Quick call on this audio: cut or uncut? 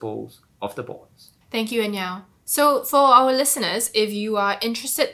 cut